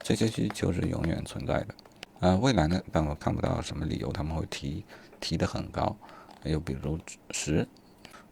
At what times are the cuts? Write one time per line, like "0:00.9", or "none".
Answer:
0:02.8